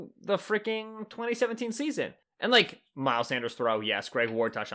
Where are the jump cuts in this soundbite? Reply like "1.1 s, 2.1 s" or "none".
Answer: 2.2 s